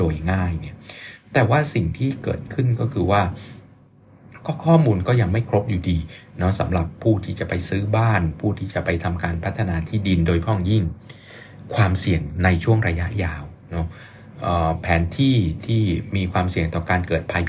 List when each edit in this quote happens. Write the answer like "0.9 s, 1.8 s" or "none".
13.6 s

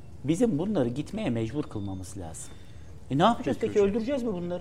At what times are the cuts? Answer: none

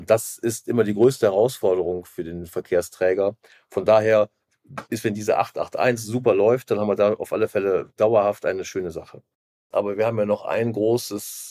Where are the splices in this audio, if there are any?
9.7 s

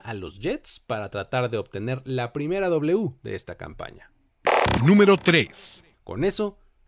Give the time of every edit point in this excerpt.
5.9 s

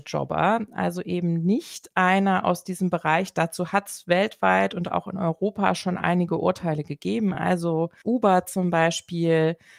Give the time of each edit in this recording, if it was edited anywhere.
none

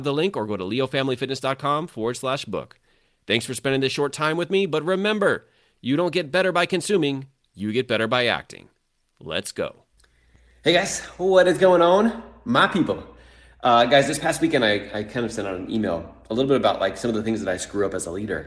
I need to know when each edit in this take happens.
none

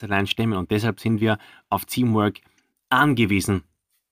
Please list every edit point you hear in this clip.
none

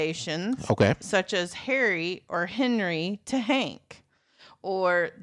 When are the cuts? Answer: none

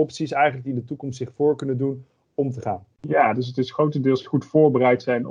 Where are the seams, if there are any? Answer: 2.9 s

